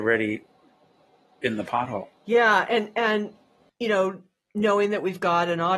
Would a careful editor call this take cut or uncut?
uncut